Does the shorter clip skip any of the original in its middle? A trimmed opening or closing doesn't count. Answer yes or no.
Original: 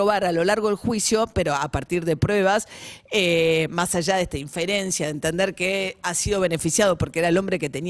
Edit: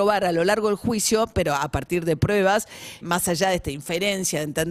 yes